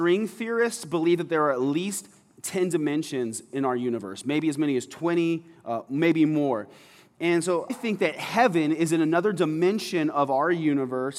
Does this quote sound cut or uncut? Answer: cut